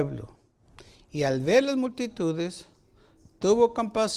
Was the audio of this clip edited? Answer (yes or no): no